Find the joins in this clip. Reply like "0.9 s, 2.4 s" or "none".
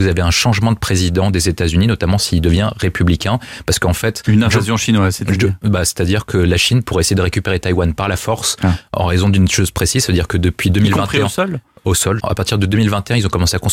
12.2 s